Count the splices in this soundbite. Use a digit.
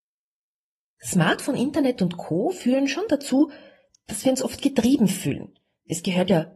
1